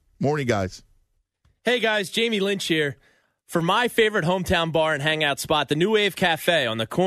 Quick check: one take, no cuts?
yes; 0 cuts

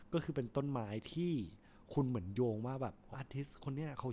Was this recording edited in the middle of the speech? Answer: yes; 1 cut; at 3.1 s

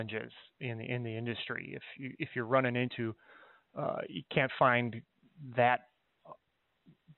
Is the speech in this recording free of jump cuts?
yes; 0 cuts

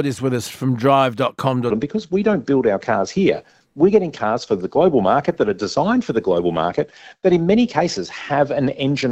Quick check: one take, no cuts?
no; 1 cut; at 1.7 s

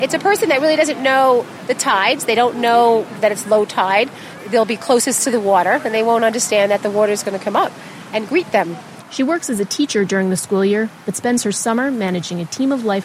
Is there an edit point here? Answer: yes; 1 cut; at 9.0 s

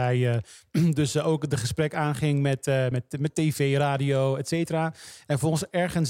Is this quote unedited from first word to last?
yes; 0 cuts

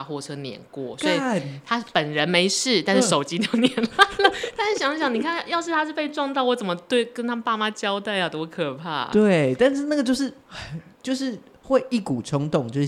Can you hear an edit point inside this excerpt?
no; 0 cuts

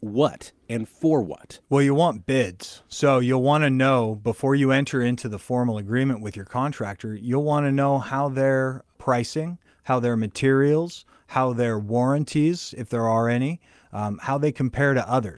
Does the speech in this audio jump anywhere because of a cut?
yes; 1 cut; at 1.6 s

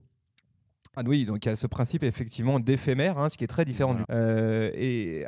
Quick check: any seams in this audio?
yes; 2 cuts; at 1.0 s, 4.0 s

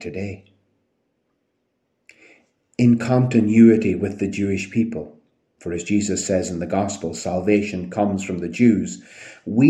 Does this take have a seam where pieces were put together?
no; 0 cuts

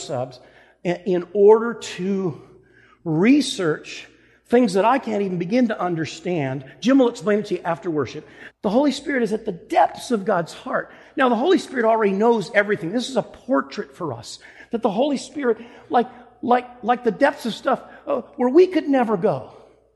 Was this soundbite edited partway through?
yes; 1 cut; at 8.5 s

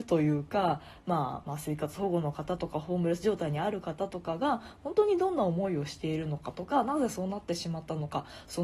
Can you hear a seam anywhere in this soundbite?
yes; 1 cut; at 1.4 s

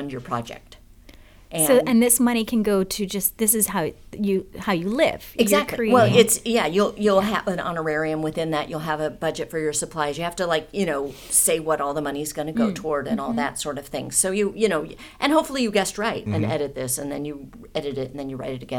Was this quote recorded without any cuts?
no; 1 cut; at 16.3 s

